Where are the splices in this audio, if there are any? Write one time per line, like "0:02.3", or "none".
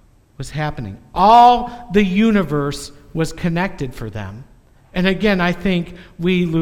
none